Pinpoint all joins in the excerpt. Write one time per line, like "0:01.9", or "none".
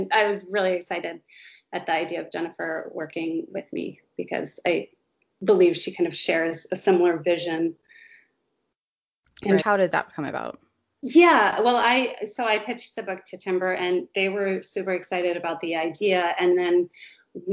0:09.6